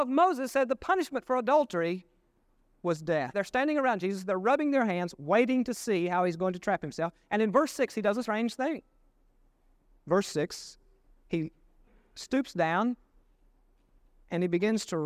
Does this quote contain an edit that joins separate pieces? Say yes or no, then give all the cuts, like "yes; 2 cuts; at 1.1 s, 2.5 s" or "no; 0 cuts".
yes; 1 cut; at 3.3 s